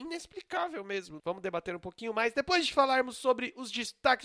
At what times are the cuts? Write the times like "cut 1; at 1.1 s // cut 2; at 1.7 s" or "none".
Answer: cut 1; at 1.2 s

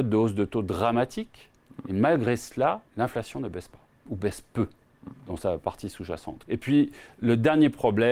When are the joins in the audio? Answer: cut 1; at 2.9 s // cut 2; at 6.4 s

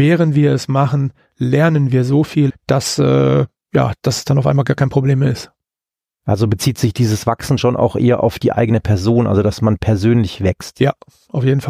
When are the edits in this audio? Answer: cut 1; at 2.5 s // cut 2; at 4.0 s

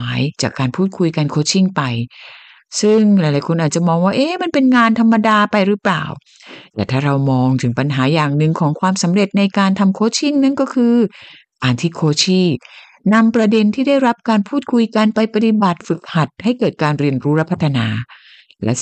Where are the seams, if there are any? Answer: none

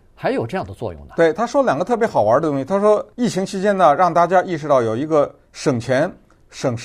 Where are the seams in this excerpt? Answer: cut 1; at 3.1 s

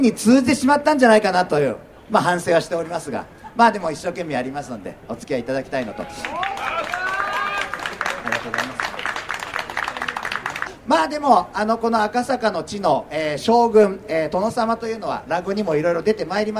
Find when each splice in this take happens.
none

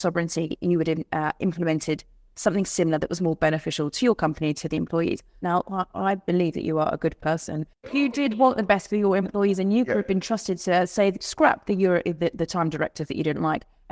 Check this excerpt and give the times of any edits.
cut 1; at 5.4 s

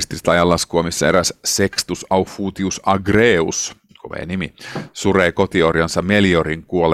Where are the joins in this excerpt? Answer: none

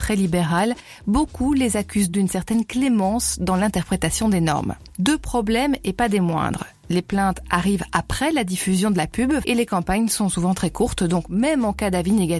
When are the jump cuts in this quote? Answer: cut 1; at 2.1 s // cut 2; at 9.4 s

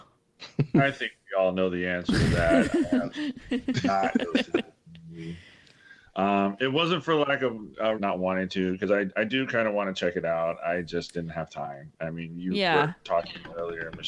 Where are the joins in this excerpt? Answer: cut 1; at 8.0 s

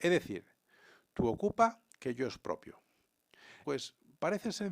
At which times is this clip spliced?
cut 1; at 3.6 s

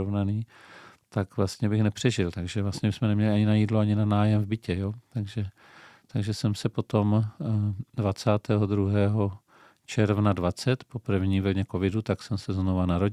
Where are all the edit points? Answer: none

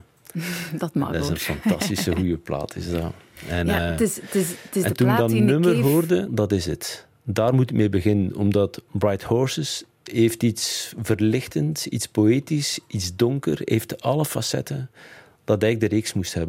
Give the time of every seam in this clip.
cut 1; at 6.3 s // cut 2; at 10.1 s

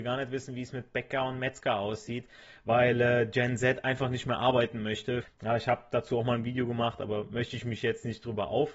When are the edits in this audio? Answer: cut 1; at 5.2 s

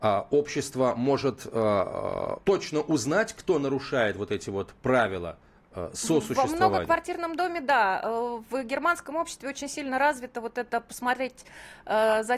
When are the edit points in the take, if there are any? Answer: cut 1; at 2.4 s

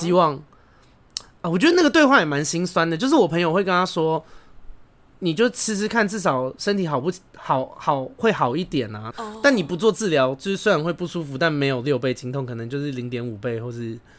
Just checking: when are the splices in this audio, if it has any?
cut 1; at 9.1 s

